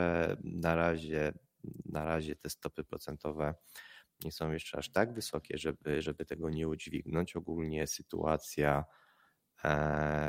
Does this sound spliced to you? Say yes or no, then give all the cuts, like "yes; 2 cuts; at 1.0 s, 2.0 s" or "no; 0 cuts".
no; 0 cuts